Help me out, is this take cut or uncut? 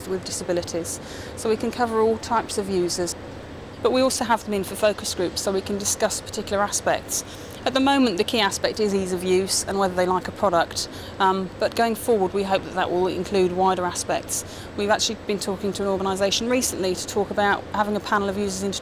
uncut